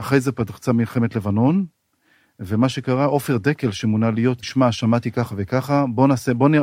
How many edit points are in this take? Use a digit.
1